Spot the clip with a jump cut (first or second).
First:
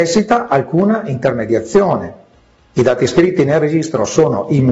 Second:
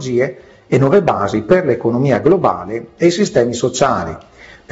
first